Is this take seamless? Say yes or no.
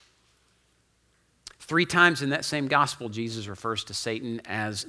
yes